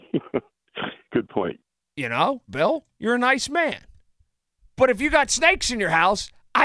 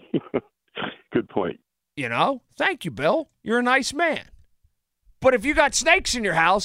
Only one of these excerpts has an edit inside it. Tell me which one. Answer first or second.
first